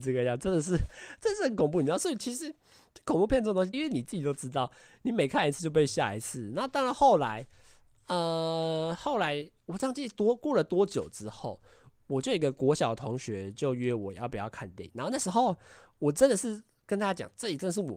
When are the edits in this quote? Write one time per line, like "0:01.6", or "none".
0:03.7